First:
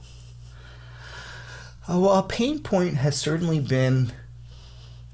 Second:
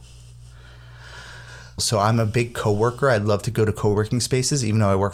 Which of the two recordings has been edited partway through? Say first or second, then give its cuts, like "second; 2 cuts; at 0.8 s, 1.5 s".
second; 1 cut; at 1.8 s